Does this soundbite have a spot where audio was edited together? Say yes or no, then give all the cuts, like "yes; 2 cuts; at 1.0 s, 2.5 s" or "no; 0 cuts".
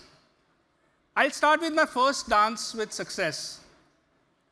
yes; 1 cut; at 1.0 s